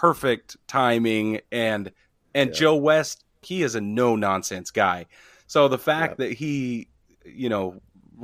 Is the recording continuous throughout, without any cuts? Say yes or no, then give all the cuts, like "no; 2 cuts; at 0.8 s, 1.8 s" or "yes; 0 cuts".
no; 1 cut; at 3.4 s